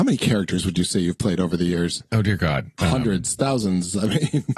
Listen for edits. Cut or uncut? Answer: uncut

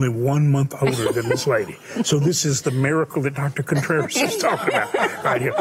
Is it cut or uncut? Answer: uncut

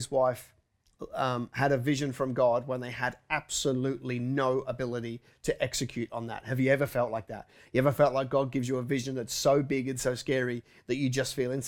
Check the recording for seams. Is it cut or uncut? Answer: uncut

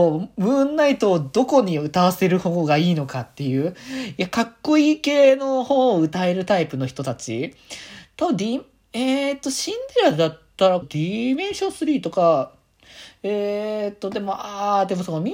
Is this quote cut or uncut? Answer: cut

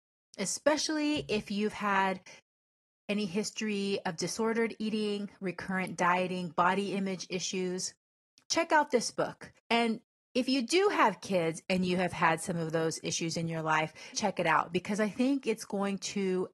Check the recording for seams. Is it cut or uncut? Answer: cut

